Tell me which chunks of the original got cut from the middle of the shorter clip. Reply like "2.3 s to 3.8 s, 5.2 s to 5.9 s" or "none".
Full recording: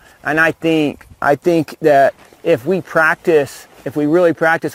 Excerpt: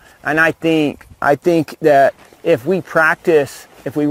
none